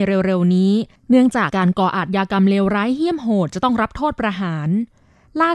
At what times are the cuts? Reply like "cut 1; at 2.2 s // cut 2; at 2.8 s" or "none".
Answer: cut 1; at 1.5 s